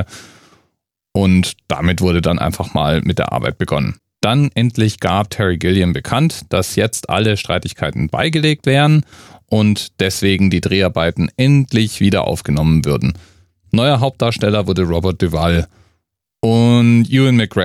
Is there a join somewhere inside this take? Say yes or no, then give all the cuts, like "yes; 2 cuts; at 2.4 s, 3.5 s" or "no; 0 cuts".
yes; 1 cut; at 4.1 s